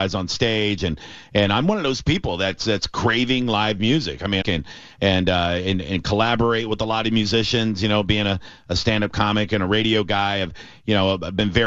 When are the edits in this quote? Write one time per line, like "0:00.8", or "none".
0:04.4